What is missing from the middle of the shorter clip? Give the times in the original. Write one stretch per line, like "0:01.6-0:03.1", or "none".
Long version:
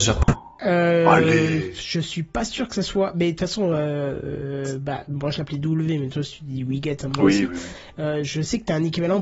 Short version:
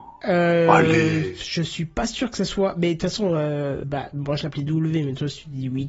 0:04.2-0:04.8